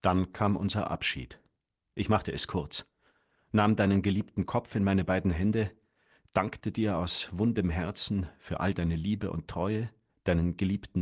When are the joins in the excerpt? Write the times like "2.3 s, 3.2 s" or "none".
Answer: 10.1 s